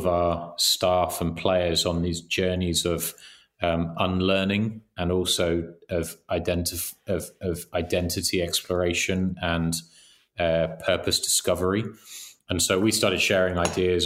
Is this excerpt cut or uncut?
uncut